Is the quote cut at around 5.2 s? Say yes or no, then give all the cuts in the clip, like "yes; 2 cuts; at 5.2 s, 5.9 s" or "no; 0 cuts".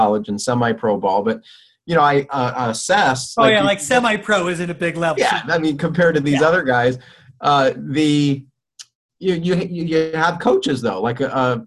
yes; 1 cut; at 5.2 s